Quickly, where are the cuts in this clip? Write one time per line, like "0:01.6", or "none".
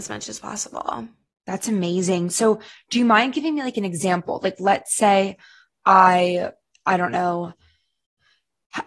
none